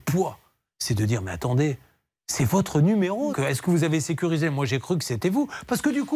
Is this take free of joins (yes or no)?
no